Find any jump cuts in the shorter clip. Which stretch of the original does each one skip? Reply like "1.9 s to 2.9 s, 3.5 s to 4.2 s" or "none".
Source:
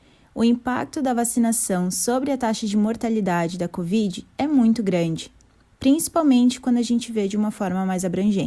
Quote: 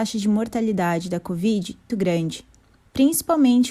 4.4 s to 4.8 s